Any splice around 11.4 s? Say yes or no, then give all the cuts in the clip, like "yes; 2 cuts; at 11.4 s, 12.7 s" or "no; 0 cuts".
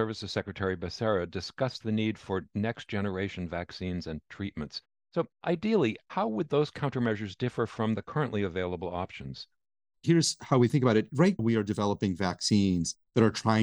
yes; 1 cut; at 11.4 s